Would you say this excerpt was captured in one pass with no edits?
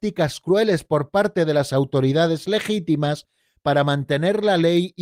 yes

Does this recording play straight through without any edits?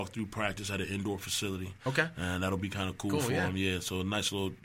yes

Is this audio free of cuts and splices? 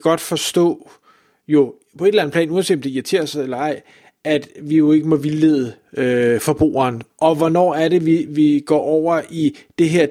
no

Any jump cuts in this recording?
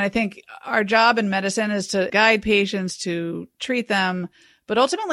no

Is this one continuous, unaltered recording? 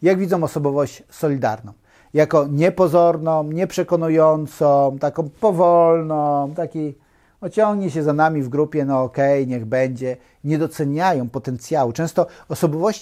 yes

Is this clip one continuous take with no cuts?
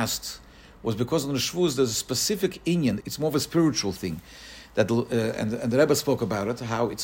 no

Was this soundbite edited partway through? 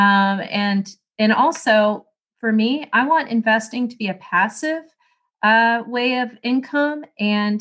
no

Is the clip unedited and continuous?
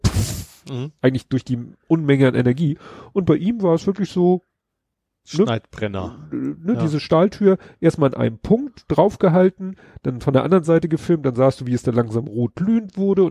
yes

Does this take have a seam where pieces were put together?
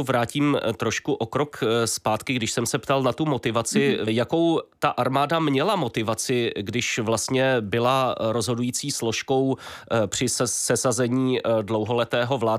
yes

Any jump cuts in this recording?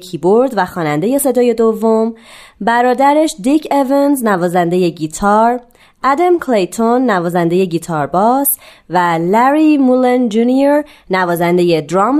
no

